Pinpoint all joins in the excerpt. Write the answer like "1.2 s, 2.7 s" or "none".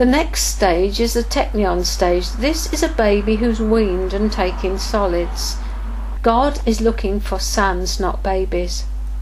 6.2 s